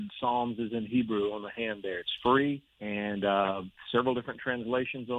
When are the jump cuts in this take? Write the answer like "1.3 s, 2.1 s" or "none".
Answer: 2.7 s